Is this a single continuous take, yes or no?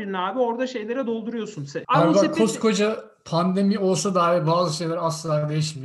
no